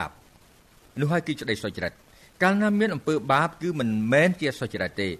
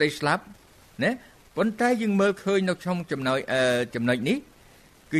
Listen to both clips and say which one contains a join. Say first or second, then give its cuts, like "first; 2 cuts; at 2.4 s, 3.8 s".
second; 1 cut; at 3.9 s